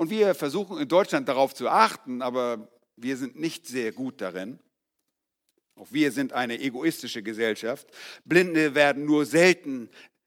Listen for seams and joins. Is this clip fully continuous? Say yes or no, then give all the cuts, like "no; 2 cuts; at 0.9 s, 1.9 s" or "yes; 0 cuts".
yes; 0 cuts